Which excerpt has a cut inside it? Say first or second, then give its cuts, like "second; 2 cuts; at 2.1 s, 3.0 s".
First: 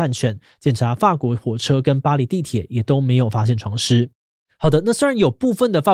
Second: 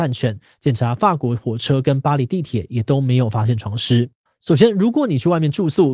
second; 1 cut; at 4.3 s